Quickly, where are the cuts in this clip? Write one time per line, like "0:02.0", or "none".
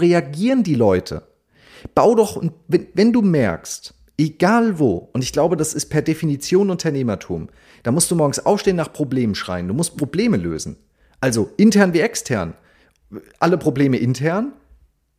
none